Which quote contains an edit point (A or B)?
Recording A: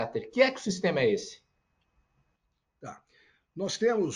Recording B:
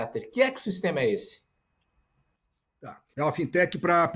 B